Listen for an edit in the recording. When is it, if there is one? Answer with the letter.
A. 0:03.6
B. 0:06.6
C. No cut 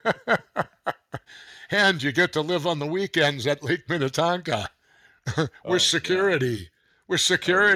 C